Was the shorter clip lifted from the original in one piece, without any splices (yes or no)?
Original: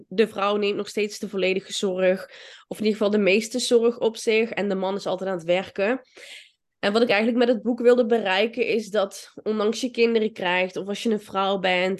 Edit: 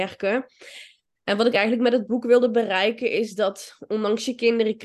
yes